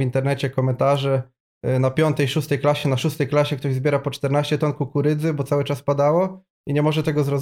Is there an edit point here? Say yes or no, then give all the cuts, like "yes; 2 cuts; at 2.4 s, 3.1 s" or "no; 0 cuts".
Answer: no; 0 cuts